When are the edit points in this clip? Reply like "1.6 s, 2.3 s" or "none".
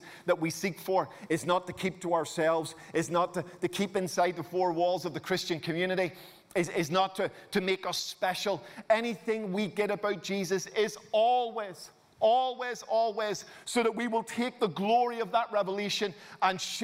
none